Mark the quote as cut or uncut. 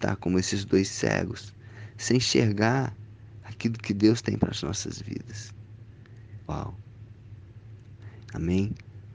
cut